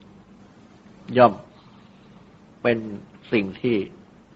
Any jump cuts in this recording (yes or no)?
yes